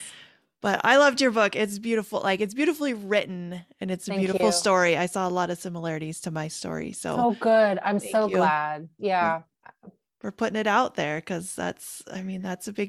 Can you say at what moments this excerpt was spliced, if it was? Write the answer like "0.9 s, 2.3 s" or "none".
none